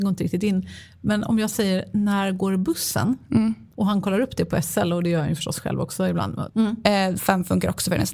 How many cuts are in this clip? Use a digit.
2